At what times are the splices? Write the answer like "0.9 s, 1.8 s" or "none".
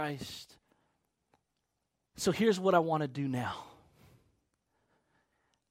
2.1 s